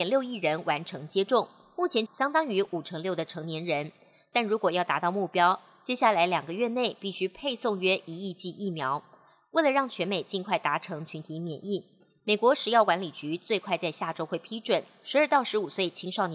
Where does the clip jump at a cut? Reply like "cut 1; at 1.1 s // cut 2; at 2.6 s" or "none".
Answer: cut 1; at 2.1 s